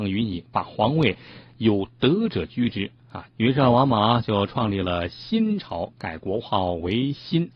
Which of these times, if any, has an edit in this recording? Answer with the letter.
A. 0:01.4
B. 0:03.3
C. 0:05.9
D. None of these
B